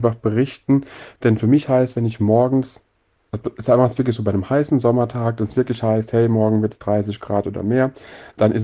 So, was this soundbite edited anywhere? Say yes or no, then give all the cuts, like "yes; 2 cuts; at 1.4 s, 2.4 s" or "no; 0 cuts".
no; 0 cuts